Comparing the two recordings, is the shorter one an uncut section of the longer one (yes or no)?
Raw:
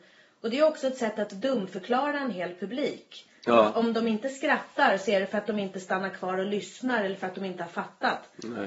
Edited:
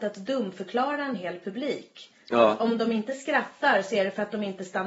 yes